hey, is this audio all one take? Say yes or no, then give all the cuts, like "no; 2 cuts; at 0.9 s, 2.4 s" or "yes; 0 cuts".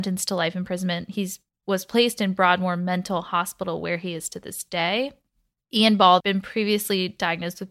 no; 1 cut; at 6.2 s